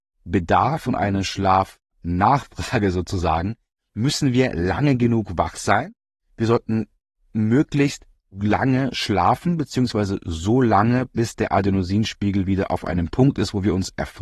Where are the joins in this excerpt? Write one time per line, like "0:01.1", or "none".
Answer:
none